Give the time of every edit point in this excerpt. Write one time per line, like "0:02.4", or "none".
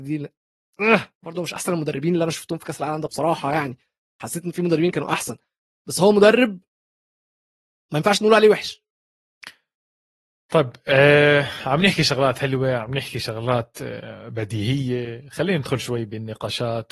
0:03.1